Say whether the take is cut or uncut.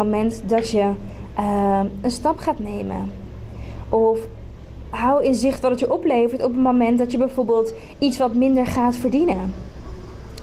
uncut